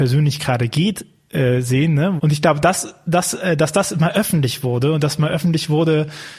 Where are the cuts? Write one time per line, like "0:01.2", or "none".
0:02.2

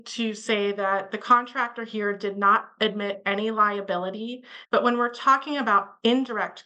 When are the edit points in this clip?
0:04.6

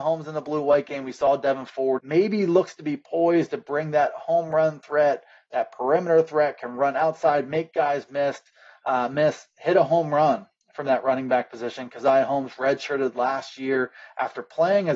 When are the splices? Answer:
0:02.0

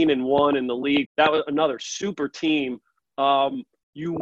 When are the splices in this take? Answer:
0:01.1

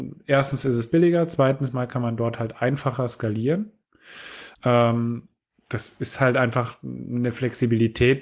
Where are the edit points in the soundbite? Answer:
0:04.5

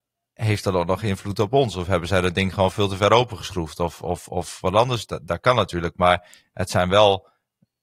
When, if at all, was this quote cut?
none

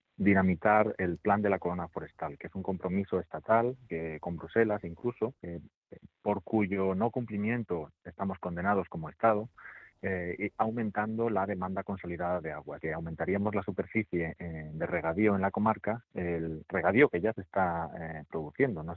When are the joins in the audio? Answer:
0:05.4
0:12.8

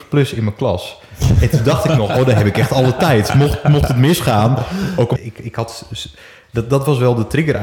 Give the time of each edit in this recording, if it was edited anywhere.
0:05.2

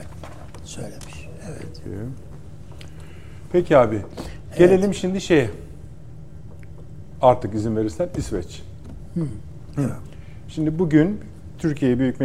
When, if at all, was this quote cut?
none

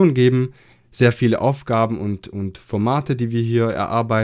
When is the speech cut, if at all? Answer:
none

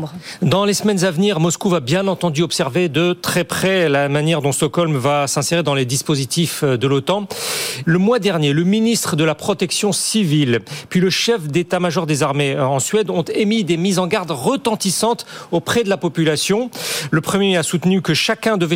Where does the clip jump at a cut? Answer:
0:07.8

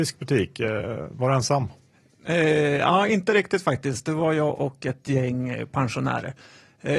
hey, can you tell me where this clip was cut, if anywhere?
none

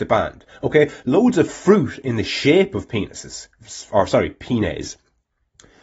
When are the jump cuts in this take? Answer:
none

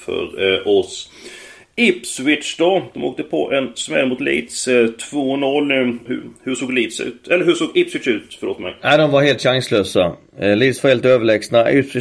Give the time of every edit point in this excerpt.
0:06.1

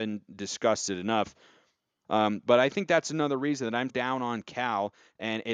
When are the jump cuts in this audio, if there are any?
0:02.0
0:03.9

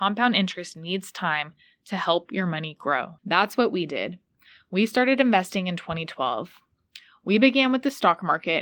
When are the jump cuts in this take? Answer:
0:03.2

